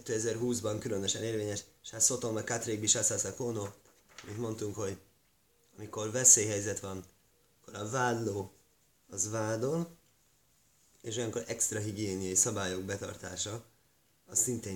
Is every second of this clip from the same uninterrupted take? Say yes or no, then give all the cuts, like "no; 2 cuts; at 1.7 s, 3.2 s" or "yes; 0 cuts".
yes; 0 cuts